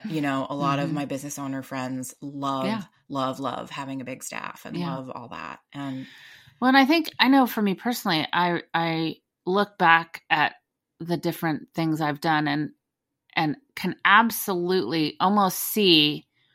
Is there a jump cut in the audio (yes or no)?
no